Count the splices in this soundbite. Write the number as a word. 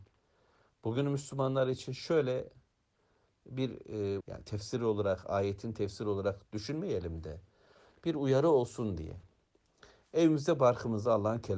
one